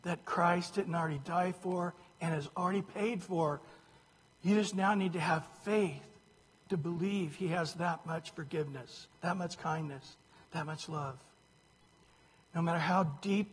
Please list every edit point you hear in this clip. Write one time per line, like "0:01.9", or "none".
0:09.1